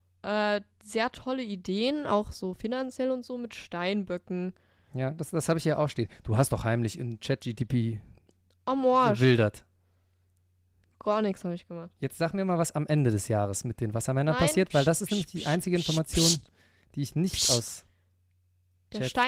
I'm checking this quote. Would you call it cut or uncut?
uncut